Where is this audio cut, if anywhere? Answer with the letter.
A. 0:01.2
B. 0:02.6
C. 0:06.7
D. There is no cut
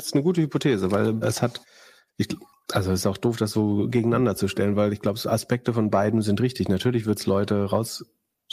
A